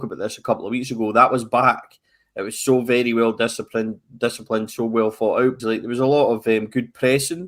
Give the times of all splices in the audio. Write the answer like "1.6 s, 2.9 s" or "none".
5.6 s

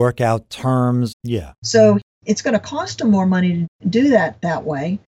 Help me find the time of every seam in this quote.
1.1 s

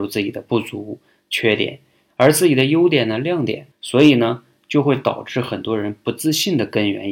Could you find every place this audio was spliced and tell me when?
3.7 s

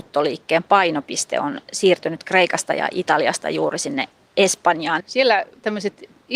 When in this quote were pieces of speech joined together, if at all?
5.0 s

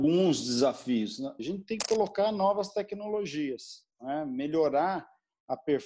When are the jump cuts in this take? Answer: 1.4 s

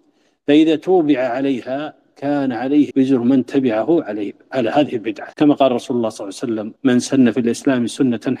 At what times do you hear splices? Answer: 2.9 s, 5.3 s, 6.8 s

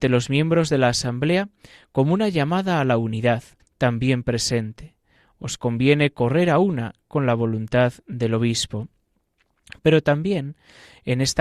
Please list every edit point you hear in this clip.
3.6 s

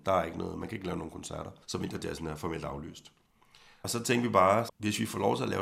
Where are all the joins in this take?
1.6 s

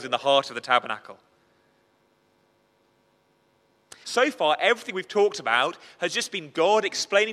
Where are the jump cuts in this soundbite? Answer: 4.0 s

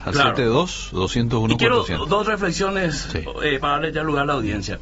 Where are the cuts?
3.6 s

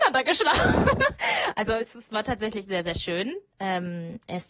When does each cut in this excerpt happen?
none

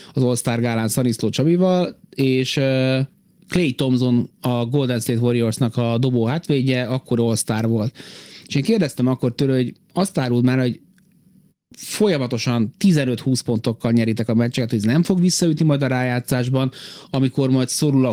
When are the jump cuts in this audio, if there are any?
none

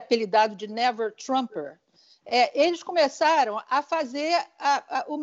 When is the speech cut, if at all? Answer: none

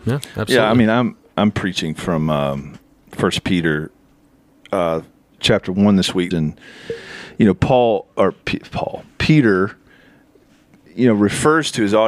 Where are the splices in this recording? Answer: 6.3 s

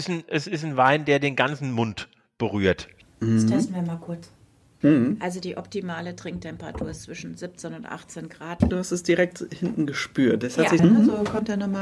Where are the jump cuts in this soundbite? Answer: 3.0 s, 8.7 s, 10.8 s

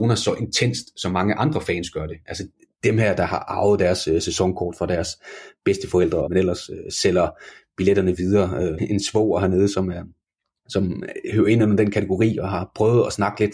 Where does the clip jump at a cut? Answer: 6.3 s, 8.8 s

